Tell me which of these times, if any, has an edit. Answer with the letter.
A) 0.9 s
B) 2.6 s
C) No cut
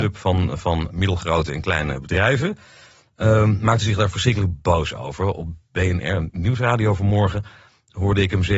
A